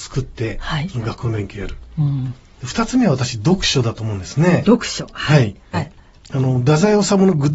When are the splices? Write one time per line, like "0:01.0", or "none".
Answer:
0:05.7